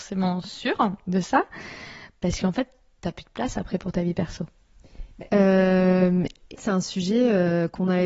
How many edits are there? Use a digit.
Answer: 2